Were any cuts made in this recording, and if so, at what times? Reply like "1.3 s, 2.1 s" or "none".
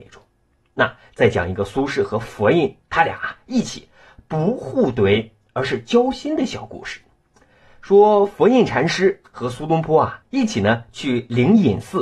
none